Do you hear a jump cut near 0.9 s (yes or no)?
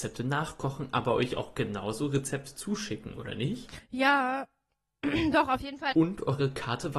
no